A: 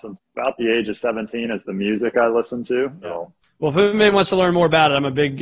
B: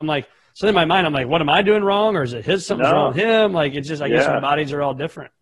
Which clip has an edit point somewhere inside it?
A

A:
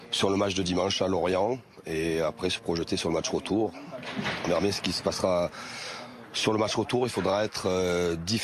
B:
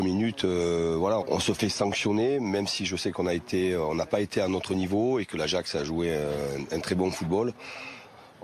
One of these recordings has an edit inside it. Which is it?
B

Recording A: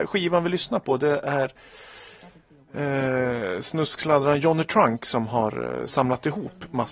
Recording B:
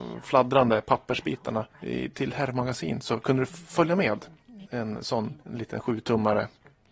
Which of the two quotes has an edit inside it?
B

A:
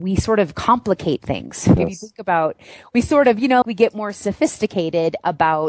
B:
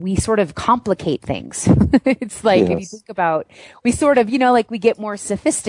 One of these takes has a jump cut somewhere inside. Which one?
A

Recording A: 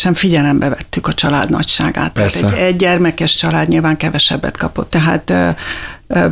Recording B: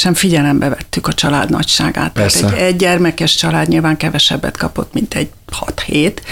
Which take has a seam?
A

